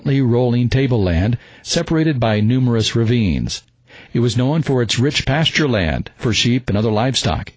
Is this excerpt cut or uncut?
uncut